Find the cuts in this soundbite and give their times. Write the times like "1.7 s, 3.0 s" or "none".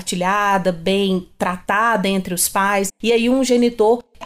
2.9 s